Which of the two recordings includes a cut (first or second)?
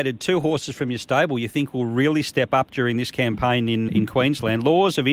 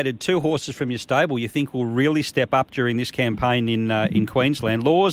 first